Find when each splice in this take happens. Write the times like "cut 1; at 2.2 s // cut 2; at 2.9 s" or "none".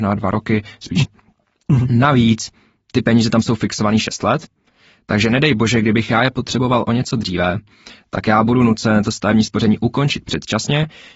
cut 1; at 1.0 s